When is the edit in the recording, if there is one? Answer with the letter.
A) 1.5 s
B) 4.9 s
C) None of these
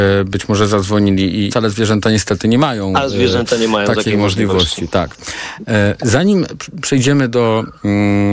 A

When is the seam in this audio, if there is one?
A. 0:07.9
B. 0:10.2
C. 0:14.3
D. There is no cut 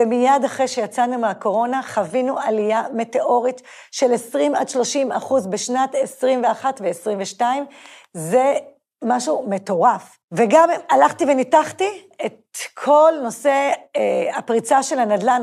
B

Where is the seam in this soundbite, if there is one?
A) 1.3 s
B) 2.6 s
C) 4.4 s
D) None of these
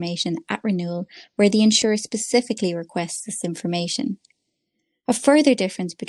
D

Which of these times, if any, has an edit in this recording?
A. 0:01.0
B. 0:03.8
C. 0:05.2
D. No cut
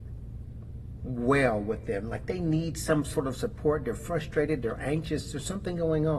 D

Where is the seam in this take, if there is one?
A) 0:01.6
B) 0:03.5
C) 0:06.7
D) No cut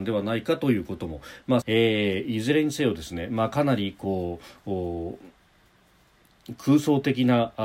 A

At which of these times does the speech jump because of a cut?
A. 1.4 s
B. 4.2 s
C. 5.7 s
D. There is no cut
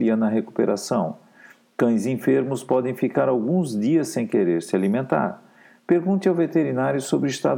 D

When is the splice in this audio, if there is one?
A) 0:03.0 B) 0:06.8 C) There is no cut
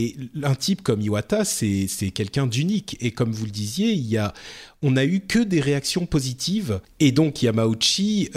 B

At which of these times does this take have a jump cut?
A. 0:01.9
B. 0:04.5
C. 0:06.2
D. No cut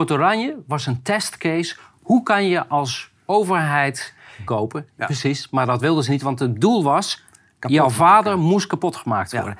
B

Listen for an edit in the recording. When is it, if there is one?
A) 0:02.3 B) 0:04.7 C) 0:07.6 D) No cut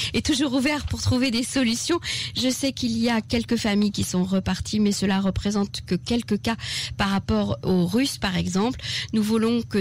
C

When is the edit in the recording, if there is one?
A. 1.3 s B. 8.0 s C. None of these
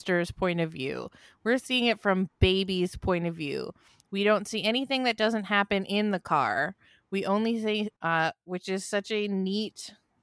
B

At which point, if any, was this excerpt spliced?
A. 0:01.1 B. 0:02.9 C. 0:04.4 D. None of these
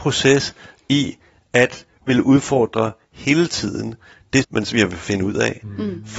C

